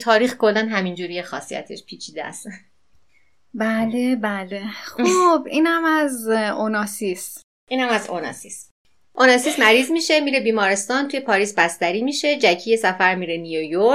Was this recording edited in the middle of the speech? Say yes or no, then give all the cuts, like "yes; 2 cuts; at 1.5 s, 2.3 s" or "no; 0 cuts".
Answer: no; 0 cuts